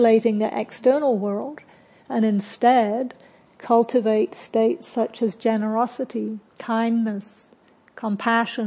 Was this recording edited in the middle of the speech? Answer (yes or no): yes